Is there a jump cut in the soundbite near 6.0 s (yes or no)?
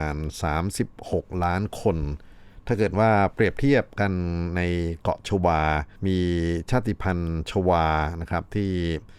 yes